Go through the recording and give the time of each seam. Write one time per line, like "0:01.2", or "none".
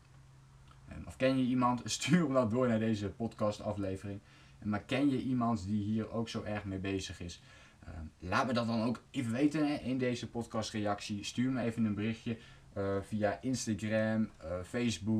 none

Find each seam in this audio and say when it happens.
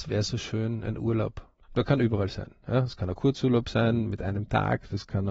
none

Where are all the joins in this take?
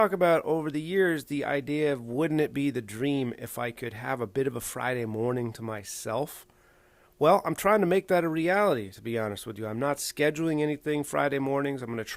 none

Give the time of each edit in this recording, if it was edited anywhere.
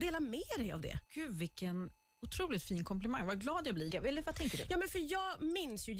0:01.0
0:03.9

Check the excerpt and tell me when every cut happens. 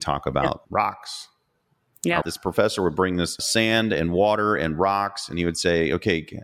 0:02.2
0:03.4

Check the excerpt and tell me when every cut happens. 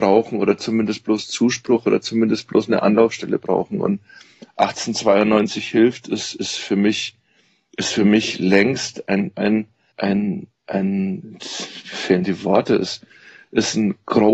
0:09.9

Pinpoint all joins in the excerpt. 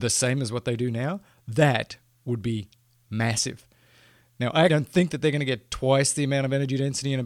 0:04.7

